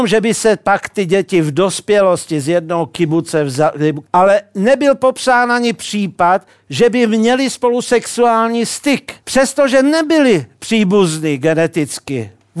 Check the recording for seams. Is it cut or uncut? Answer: cut